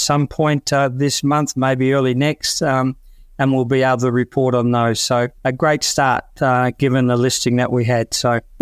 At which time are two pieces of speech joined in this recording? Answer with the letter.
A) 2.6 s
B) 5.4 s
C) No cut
B